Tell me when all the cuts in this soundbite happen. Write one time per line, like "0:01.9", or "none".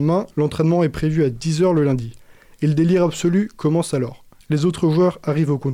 0:04.4